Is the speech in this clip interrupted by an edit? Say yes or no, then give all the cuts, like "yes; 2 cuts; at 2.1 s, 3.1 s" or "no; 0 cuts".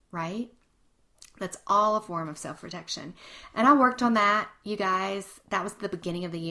no; 0 cuts